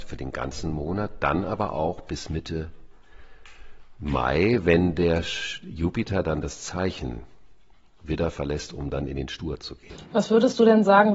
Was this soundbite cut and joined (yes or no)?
no